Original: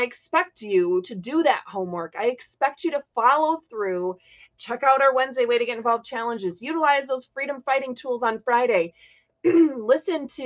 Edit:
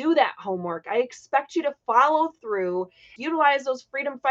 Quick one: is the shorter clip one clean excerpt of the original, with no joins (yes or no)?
no